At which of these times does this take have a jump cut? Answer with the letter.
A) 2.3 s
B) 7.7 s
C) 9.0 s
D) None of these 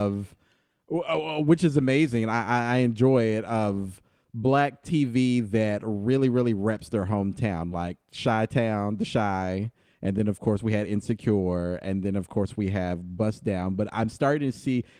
D